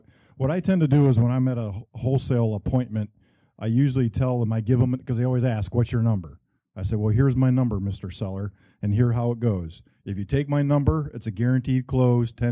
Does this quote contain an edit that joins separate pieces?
no; 0 cuts

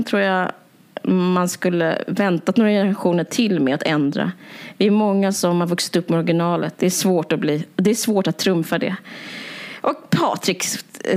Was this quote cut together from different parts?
no; 0 cuts

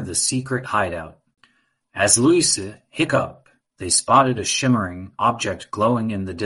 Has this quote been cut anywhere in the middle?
yes; 1 cut; at 3.6 s

